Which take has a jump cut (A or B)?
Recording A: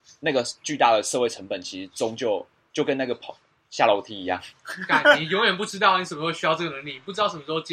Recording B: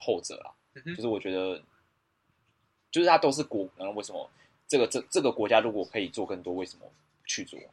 B